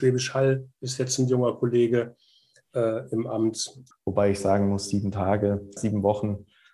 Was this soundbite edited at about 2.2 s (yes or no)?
no